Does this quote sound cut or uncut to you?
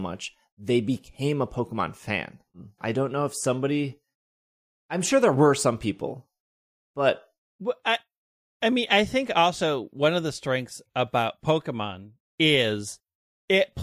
cut